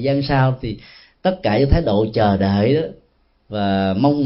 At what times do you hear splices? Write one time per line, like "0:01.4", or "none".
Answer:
none

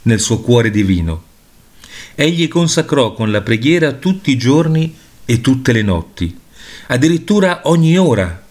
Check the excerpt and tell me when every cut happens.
none

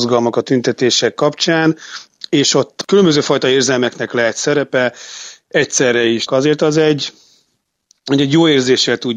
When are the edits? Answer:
0:06.3

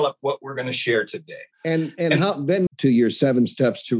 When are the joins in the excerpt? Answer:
0:01.5
0:02.7

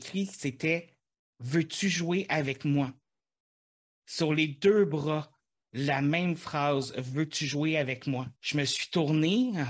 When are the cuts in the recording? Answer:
0:08.4

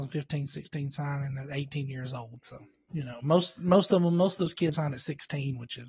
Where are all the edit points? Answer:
0:02.9
0:04.7

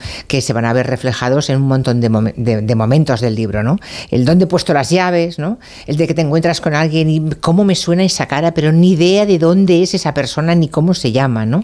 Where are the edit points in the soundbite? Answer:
none

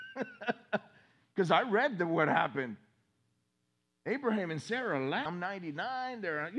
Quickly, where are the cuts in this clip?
0:05.3

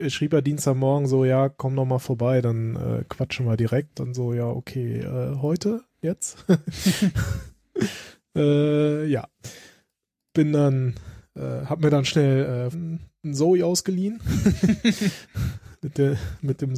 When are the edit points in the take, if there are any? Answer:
0:03.9
0:12.7

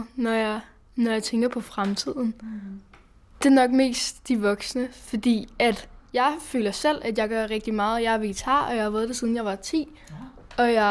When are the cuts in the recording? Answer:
0:03.3

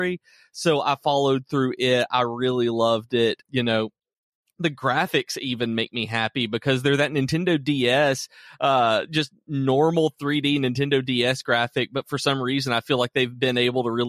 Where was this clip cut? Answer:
0:03.4

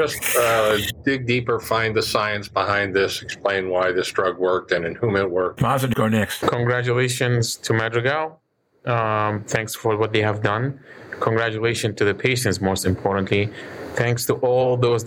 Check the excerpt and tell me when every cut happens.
0:05.9

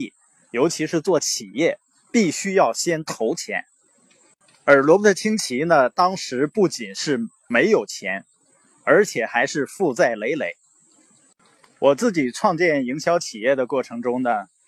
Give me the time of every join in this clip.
none

